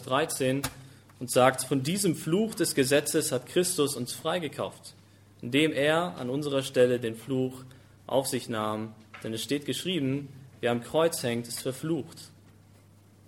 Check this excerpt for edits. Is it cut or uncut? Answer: uncut